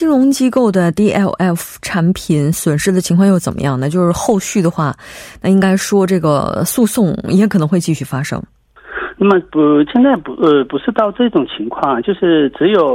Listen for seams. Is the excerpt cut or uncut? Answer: uncut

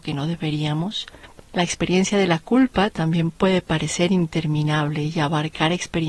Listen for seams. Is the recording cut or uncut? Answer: cut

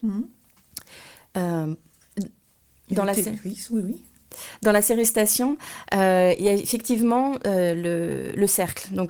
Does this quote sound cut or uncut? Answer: uncut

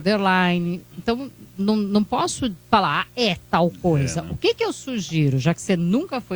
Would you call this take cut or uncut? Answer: uncut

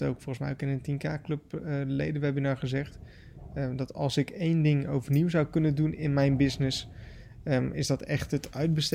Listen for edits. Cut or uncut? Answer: uncut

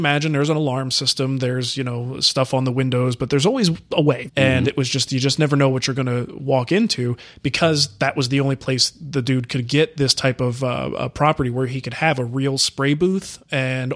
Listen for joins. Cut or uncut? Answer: cut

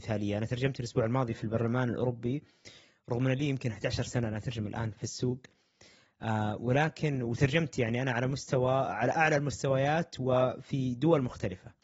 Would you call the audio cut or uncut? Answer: cut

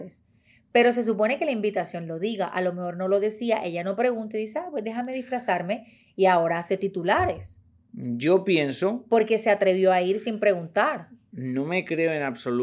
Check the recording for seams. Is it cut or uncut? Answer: uncut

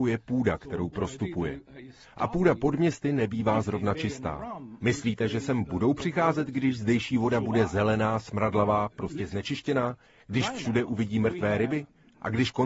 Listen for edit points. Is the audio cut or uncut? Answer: cut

